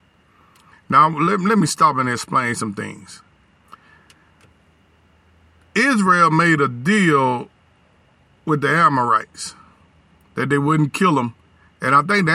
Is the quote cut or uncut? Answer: uncut